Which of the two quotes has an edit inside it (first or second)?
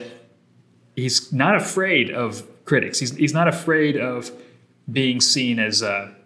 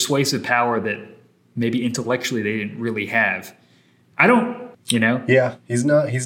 second